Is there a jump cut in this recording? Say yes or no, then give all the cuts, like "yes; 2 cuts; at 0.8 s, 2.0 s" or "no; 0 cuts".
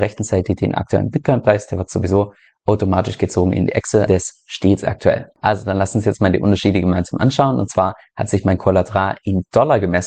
yes; 1 cut; at 4.1 s